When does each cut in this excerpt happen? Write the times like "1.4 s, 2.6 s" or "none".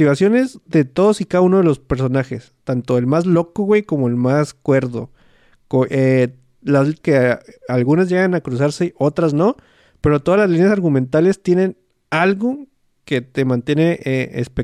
7.0 s